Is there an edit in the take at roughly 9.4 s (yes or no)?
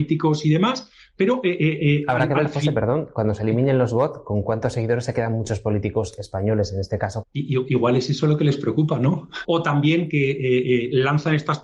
yes